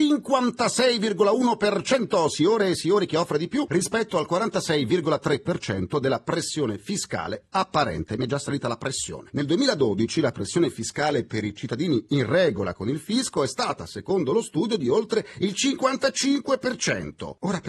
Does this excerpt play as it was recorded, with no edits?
yes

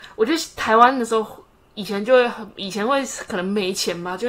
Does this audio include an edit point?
no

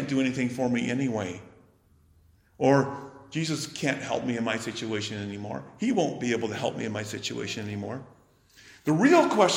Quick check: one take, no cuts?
yes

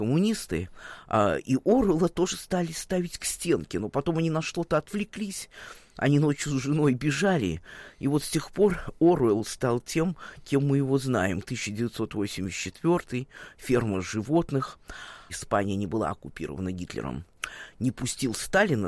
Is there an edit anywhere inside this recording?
yes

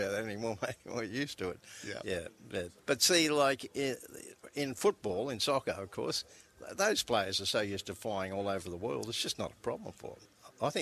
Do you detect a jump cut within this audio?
yes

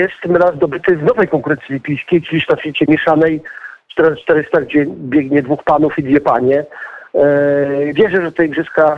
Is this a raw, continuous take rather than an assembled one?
no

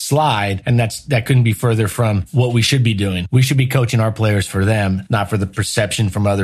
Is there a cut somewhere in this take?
no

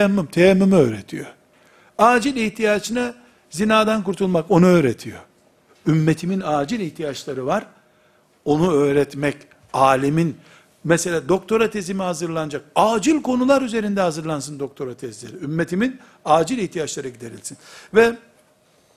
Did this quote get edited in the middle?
no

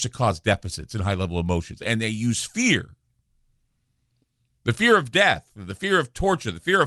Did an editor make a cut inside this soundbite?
no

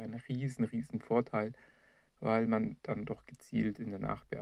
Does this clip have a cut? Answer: no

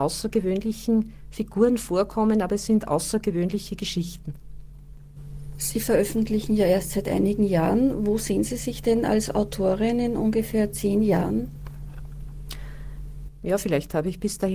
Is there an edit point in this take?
no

